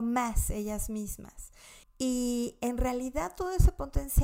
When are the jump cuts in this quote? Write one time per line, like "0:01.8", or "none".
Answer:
0:01.8